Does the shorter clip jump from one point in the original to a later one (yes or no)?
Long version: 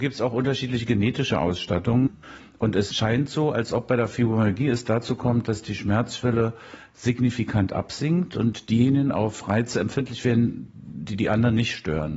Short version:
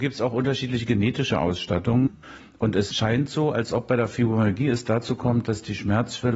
no